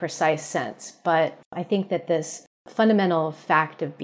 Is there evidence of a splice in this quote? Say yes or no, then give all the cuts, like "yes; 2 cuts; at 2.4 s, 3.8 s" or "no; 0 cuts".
no; 0 cuts